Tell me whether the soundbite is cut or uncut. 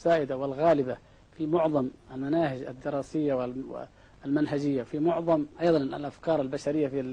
cut